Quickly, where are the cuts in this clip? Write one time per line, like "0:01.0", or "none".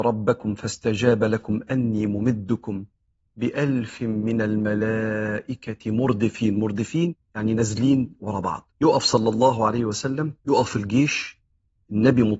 0:07.2
0:08.7
0:10.4